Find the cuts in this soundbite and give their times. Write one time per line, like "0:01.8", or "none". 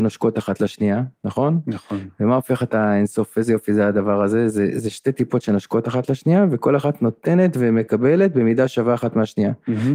none